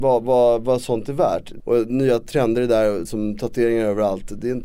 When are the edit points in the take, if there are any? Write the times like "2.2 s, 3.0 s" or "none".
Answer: 1.6 s, 3.1 s